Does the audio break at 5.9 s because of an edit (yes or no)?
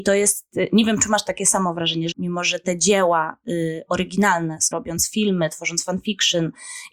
no